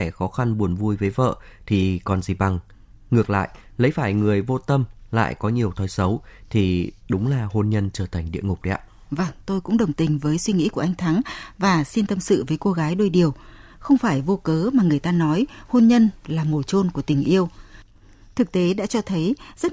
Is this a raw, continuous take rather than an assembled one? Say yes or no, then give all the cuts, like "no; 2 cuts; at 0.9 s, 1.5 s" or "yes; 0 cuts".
yes; 0 cuts